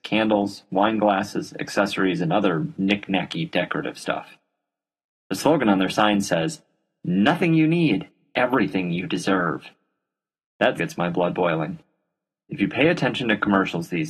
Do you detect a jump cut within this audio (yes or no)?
yes